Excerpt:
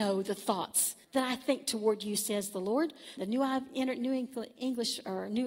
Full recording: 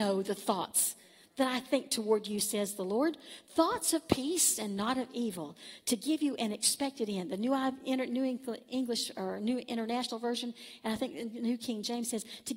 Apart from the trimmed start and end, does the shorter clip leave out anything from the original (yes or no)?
yes